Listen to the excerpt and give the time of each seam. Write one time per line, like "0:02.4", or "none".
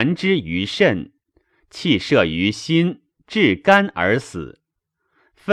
none